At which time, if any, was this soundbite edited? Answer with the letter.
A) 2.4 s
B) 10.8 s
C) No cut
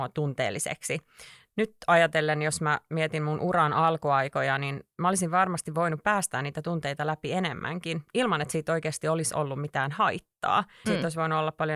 B